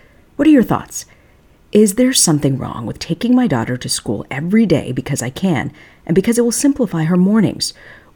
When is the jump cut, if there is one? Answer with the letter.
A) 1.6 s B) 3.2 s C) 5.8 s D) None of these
D